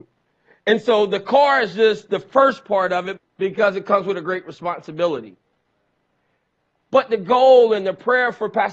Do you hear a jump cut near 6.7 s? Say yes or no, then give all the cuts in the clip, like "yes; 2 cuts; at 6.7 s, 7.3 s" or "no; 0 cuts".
no; 1 cut; at 3.2 s